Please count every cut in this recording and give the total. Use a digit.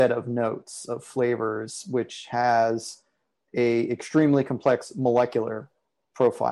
0